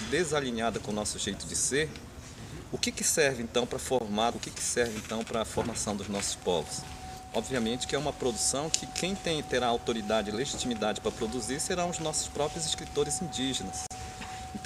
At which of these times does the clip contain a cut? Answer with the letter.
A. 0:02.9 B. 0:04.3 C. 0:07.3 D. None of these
B